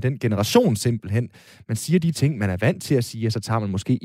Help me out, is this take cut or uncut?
uncut